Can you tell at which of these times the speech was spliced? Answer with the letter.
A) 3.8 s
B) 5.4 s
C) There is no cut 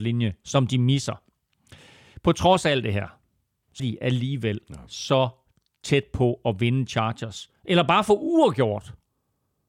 A